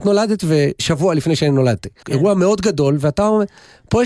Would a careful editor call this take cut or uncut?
cut